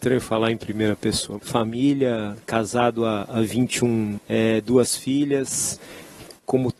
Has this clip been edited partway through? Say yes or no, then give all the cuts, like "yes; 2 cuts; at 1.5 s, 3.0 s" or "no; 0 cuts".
yes; 2 cuts; at 1.4 s, 4.2 s